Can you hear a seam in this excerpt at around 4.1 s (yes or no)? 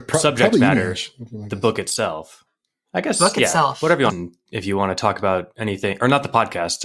yes